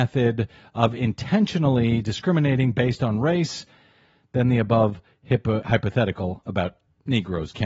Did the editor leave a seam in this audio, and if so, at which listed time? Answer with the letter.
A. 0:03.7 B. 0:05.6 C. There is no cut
B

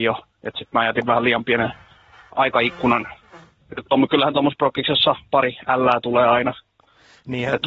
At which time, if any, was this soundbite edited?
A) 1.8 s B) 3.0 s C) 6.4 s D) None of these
D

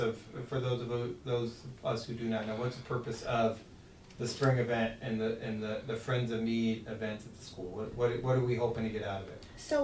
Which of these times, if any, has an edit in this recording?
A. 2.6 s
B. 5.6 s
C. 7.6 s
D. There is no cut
D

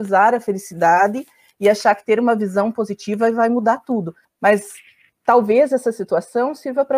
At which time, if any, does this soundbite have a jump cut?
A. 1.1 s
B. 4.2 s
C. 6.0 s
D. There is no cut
B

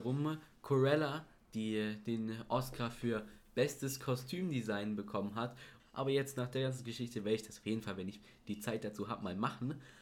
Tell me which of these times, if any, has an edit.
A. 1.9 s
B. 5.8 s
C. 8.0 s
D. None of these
B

